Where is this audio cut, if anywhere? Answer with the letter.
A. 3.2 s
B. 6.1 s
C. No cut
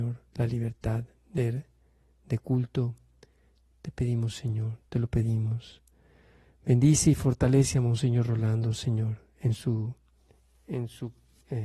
C